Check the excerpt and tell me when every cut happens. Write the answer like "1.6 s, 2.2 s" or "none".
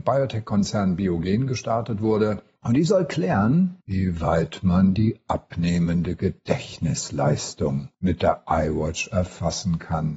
none

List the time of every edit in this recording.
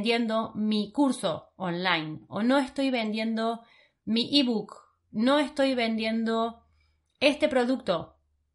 none

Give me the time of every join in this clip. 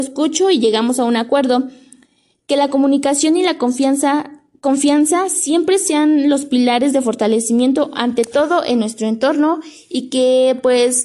none

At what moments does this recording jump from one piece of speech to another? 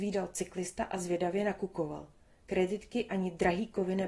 none

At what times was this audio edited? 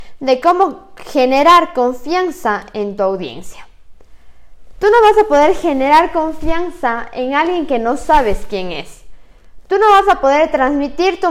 4.7 s

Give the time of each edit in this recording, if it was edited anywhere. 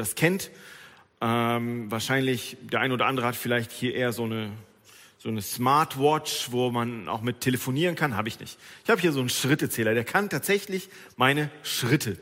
none

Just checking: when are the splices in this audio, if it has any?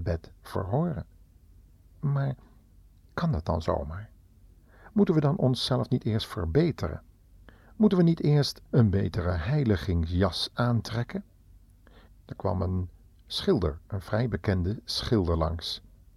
8.7 s, 12.1 s

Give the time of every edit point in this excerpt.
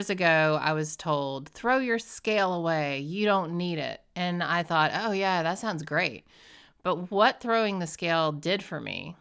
none

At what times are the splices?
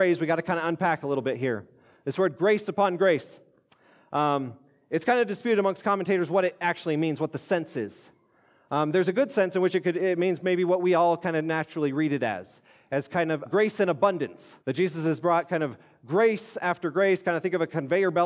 13.5 s, 14.6 s

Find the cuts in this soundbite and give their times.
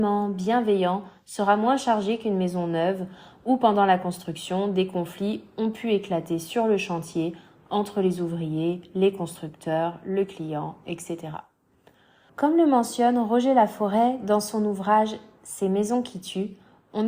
12.3 s

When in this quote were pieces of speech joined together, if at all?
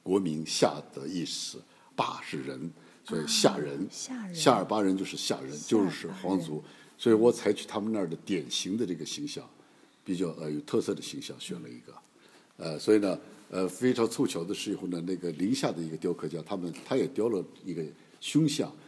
1.9 s

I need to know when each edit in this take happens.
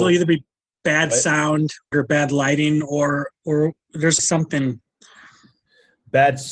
1.9 s, 4.2 s

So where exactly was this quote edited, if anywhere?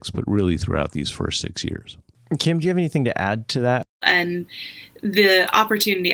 4.0 s

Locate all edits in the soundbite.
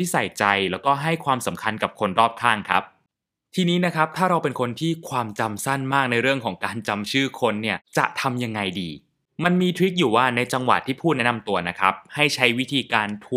none

